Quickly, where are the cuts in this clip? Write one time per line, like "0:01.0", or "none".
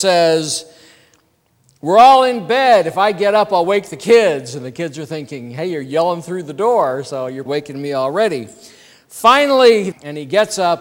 0:07.5
0:09.9